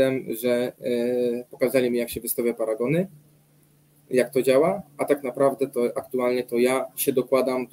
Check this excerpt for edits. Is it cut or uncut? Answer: uncut